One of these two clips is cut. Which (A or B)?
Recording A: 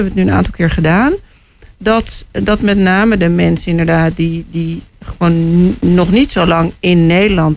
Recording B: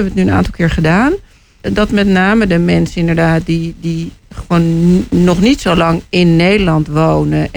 B